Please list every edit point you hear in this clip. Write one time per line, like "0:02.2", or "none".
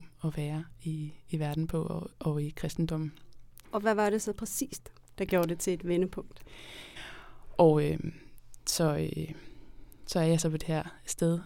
0:03.6
0:07.0